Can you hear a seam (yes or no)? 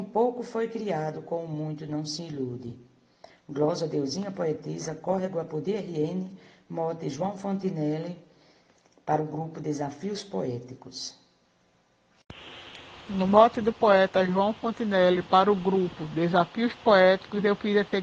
no